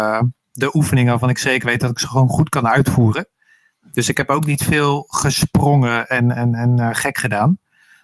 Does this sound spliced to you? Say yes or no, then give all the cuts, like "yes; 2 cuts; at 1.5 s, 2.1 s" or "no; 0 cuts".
no; 0 cuts